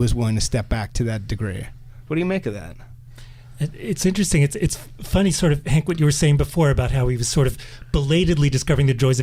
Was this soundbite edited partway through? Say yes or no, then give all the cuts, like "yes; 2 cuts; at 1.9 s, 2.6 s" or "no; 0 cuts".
no; 0 cuts